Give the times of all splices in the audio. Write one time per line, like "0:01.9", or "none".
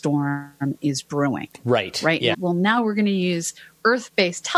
0:02.3